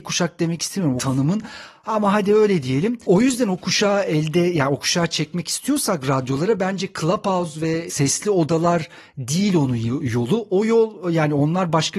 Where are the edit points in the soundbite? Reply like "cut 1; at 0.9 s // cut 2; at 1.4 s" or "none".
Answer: cut 1; at 1.0 s // cut 2; at 3.0 s